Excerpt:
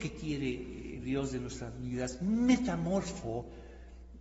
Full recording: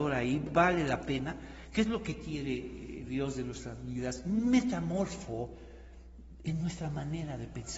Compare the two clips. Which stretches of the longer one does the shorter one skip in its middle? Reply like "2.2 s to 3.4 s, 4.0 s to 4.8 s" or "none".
none